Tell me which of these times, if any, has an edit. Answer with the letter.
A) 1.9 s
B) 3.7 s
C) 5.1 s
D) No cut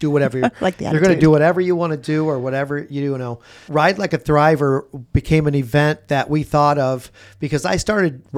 B